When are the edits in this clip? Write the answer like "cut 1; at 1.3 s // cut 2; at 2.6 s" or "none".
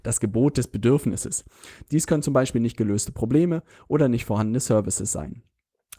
cut 1; at 1.9 s